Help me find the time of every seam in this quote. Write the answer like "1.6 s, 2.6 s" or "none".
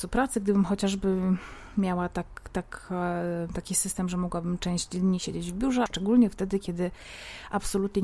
5.9 s